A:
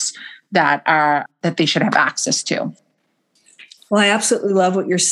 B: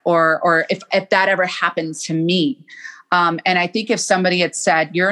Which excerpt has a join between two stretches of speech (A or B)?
A